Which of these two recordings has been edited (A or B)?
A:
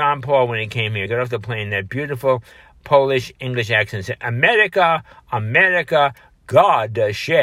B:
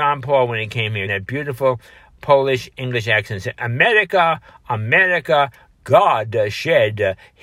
B